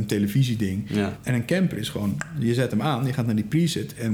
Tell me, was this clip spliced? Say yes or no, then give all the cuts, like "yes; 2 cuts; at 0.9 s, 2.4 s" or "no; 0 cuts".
yes; 1 cut; at 1.2 s